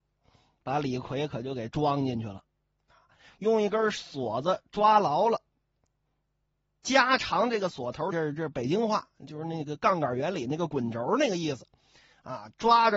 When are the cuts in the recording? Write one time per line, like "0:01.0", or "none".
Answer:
0:08.1